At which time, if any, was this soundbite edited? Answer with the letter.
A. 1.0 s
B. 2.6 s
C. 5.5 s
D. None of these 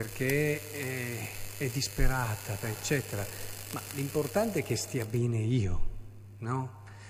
B